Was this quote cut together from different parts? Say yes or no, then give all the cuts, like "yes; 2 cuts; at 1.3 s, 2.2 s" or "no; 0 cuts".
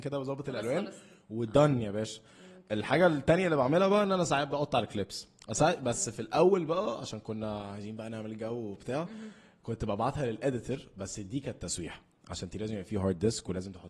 no; 0 cuts